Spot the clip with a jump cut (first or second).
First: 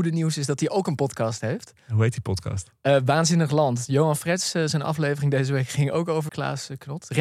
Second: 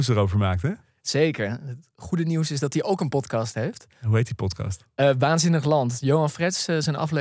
first